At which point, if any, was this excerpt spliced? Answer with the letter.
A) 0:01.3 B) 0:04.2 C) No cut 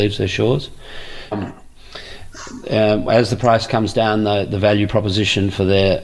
A